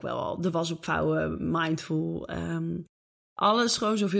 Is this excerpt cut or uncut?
uncut